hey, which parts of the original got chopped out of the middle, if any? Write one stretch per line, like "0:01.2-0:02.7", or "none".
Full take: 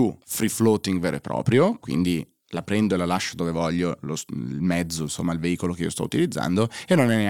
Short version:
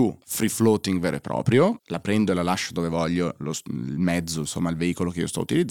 0:01.8-0:02.4